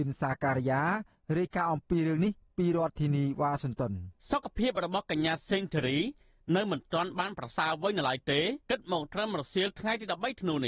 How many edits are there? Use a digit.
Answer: 2